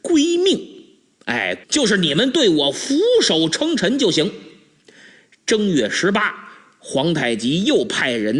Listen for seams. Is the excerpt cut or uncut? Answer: cut